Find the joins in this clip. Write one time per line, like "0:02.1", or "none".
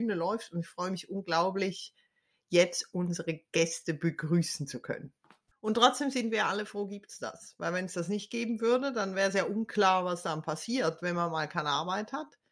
0:05.5

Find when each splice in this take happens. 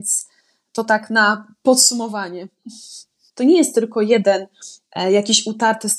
0:03.3

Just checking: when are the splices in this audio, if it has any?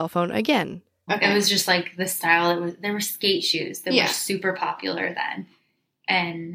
0:01.1

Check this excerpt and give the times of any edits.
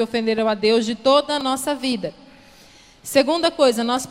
none

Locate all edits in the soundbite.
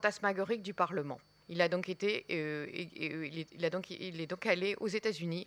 0:01.4

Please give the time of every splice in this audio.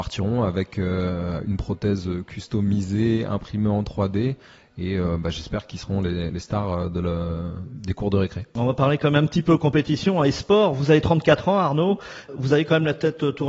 none

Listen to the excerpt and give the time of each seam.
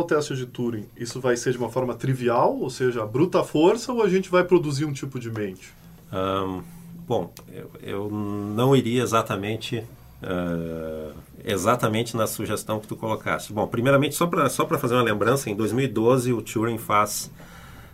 0:07.5

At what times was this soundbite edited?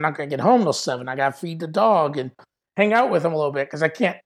none

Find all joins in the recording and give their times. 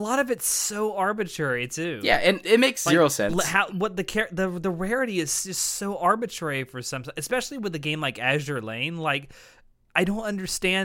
0:02.4

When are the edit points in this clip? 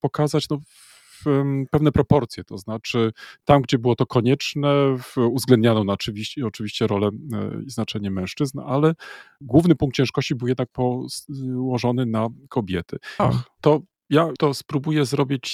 0:13.2
0:14.4

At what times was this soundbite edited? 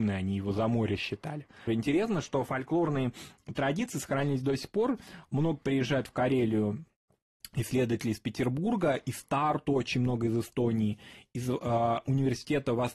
0:01.7

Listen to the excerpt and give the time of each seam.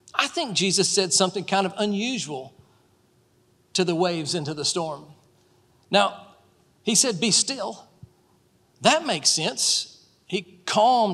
none

